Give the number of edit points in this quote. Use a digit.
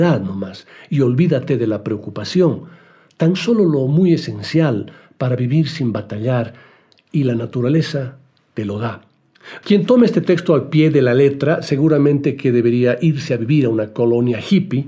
1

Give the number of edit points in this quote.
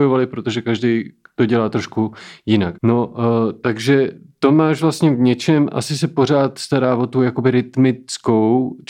1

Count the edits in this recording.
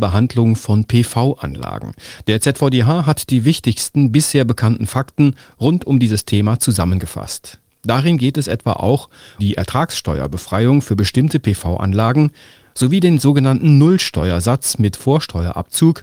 2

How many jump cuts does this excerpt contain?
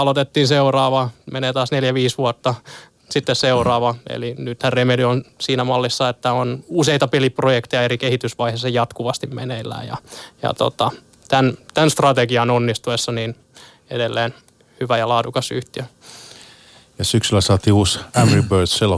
0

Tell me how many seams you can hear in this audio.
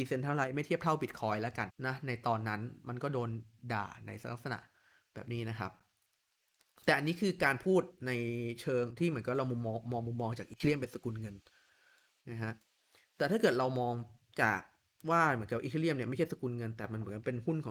1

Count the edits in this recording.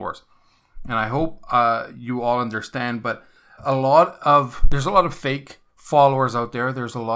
2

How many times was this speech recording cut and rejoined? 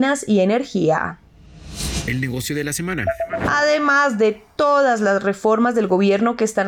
0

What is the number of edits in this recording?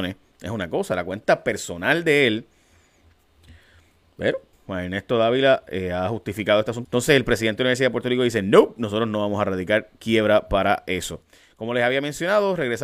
2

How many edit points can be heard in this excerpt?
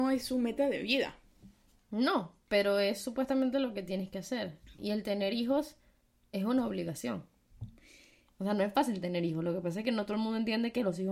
2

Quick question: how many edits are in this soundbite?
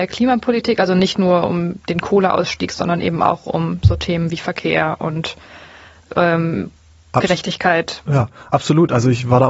0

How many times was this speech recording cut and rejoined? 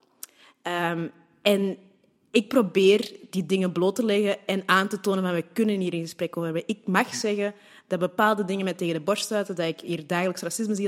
0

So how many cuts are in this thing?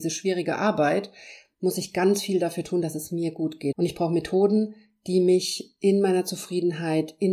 1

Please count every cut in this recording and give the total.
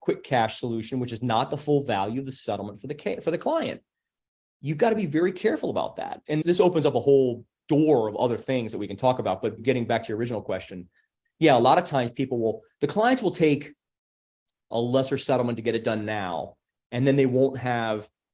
1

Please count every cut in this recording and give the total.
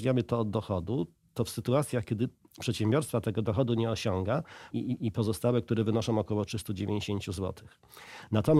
1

